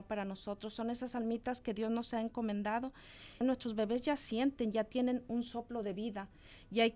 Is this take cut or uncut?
cut